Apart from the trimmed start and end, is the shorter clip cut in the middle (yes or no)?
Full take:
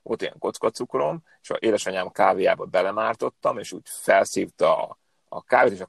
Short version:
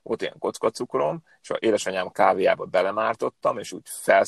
no